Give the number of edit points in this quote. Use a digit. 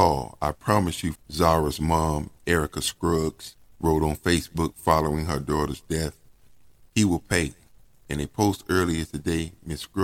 2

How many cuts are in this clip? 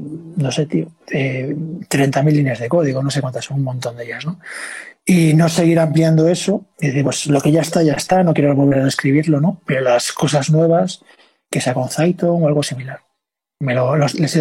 1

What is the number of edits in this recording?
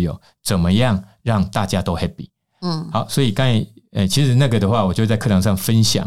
0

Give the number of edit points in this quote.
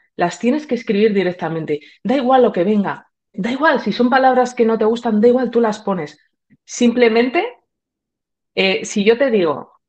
2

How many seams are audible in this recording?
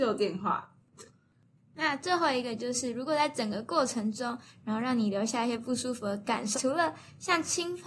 2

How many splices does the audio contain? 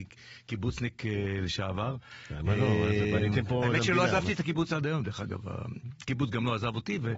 0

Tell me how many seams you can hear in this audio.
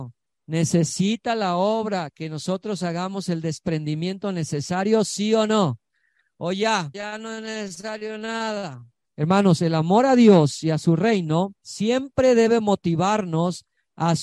3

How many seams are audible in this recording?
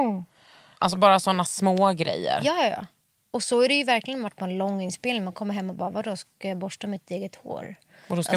0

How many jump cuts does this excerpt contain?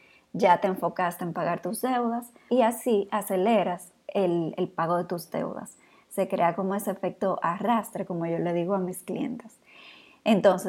1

